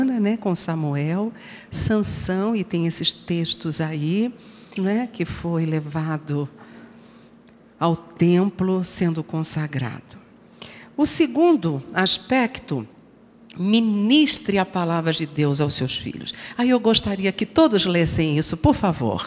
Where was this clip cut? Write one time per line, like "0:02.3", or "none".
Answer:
0:04.8

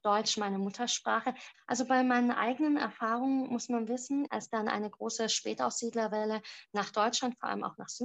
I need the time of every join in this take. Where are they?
0:01.5
0:04.3

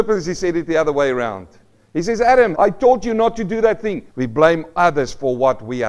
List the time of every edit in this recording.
0:02.5
0:04.1

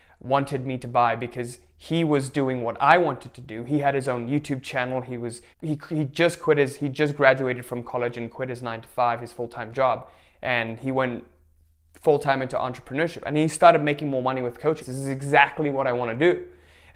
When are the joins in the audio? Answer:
0:05.5
0:14.8

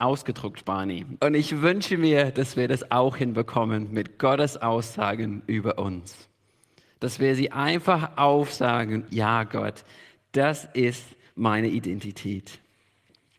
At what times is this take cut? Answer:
0:01.2
0:09.1

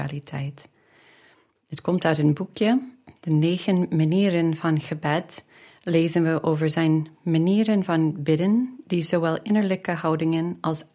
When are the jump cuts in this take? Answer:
none

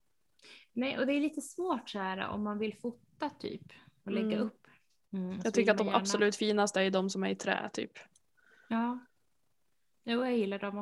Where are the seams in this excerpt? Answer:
none

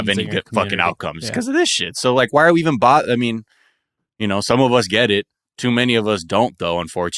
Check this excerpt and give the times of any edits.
none

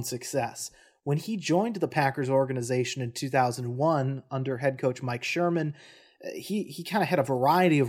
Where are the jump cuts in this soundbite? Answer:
none

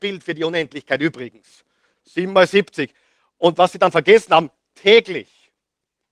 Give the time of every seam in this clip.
0:02.0

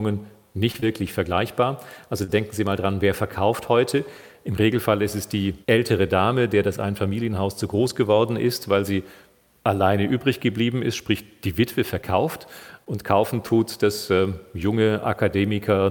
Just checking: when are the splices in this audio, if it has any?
0:05.6

